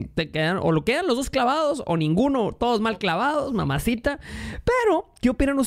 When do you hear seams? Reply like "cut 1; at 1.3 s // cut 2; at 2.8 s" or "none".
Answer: none

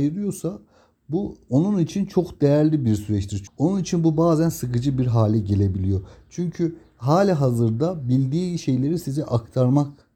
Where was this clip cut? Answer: cut 1; at 3.5 s

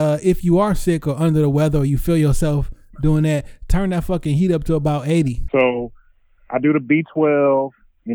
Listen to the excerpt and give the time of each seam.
cut 1; at 5.5 s

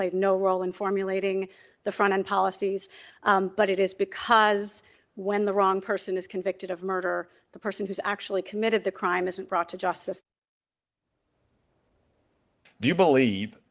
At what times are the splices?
cut 1; at 12.7 s

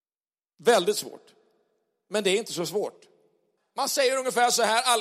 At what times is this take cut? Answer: cut 1; at 3.6 s

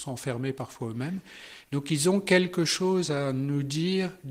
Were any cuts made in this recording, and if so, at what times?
cut 1; at 1.6 s

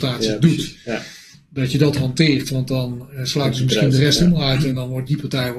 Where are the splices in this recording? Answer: none

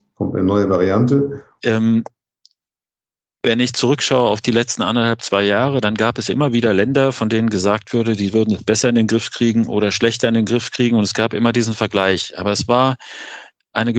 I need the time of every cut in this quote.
cut 1; at 1.6 s

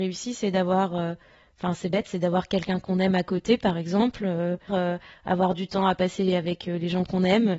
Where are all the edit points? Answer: cut 1; at 4.7 s

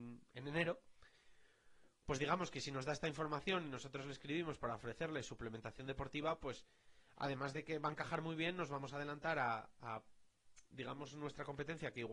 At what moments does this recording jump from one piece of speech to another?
none

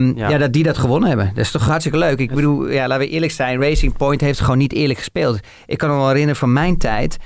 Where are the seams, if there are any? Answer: none

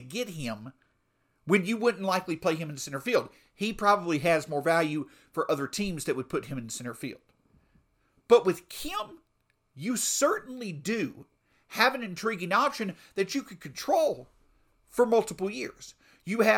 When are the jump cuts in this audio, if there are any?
none

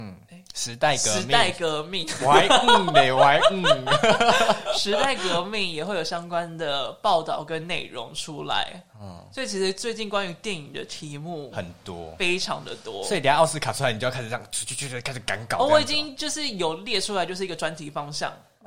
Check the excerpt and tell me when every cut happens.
none

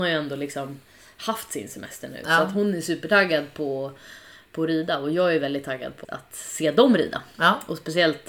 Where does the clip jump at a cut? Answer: cut 1; at 6.0 s

